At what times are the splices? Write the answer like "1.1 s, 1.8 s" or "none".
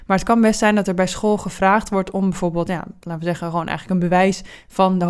none